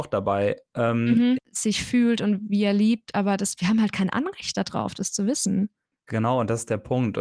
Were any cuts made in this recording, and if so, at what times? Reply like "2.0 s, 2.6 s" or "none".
1.4 s

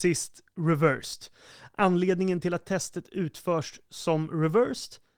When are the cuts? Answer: none

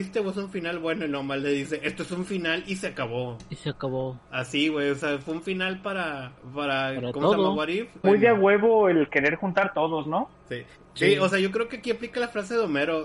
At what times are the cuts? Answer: 8.0 s

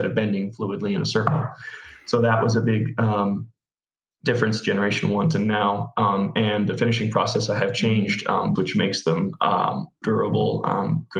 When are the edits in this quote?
8.6 s, 10.0 s

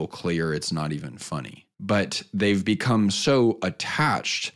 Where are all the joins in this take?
1.7 s

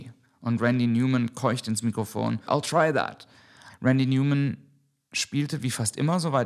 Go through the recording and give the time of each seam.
2.5 s, 3.7 s

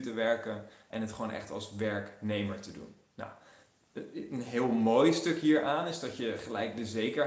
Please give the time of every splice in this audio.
0.9 s

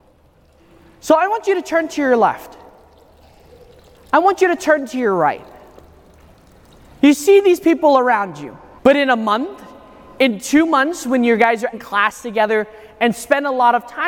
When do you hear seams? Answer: 8.8 s, 11.7 s

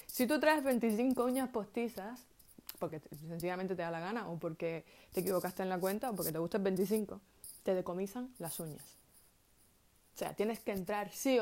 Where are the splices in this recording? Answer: 2.9 s

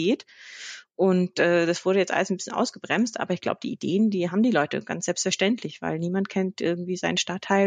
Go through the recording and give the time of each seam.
none

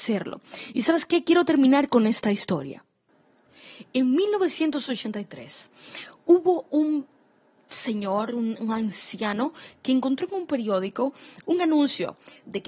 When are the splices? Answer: none

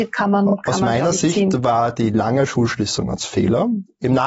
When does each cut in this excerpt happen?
none

